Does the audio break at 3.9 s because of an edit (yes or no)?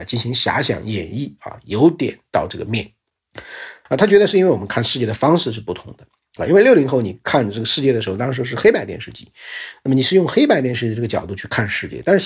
yes